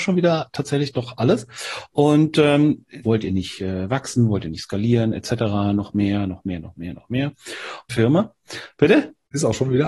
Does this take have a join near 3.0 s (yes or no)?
yes